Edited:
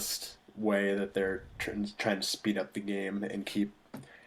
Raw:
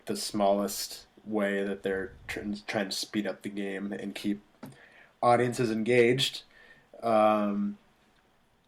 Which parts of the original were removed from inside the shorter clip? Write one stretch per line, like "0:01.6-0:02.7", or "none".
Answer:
none